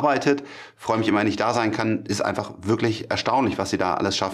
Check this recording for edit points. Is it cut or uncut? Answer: uncut